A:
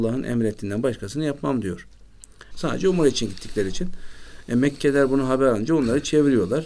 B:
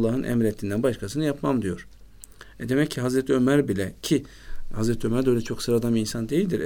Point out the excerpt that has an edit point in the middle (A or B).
A